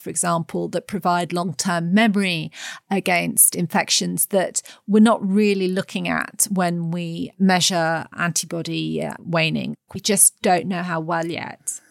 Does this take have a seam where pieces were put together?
yes; 1 cut; at 9.9 s

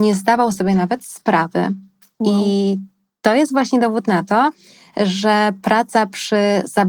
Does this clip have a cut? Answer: no; 0 cuts

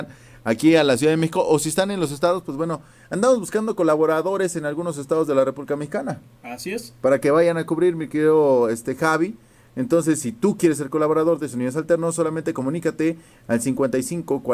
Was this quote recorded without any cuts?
yes; 0 cuts

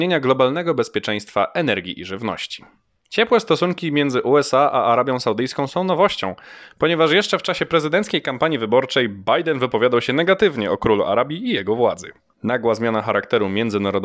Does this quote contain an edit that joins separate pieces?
no; 0 cuts

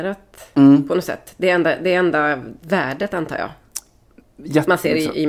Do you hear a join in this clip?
no; 0 cuts

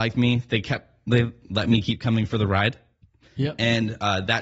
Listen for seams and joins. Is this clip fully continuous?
yes; 0 cuts

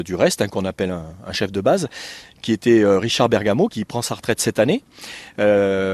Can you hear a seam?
yes; 1 cut; at 3.7 s

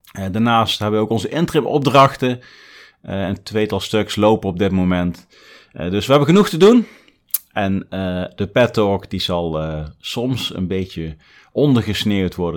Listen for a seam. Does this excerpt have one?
no; 0 cuts

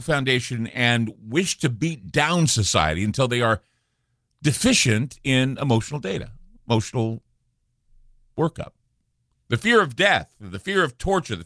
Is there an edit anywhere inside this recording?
yes; 1 cut; at 9.3 s

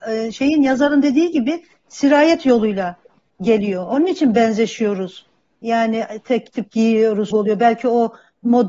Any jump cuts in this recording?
yes; 1 cut; at 7.3 s

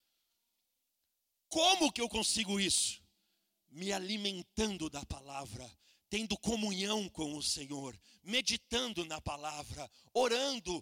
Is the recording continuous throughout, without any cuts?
yes; 0 cuts

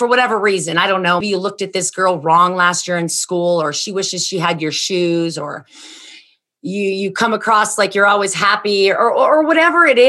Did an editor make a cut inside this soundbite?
yes; 1 cut; at 1.2 s

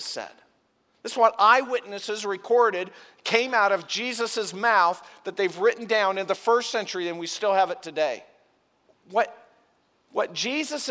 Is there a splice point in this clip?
yes; 1 cut; at 8.9 s

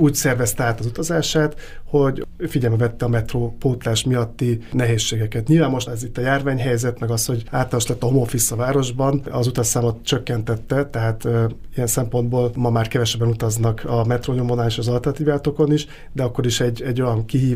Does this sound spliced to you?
yes; 1 cut; at 5.9 s

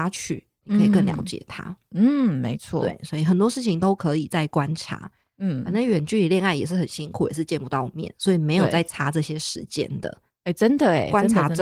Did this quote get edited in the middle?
no; 0 cuts

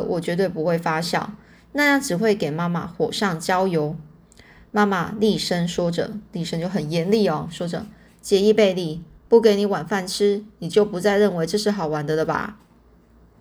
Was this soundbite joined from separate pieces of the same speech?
yes; 1 cut; at 9.3 s

